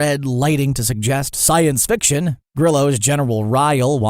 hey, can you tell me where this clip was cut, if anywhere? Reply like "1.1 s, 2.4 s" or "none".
2.4 s